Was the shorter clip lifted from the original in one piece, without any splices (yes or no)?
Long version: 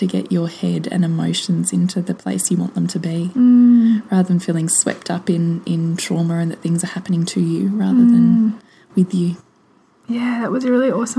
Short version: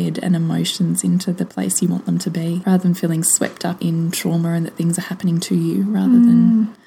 no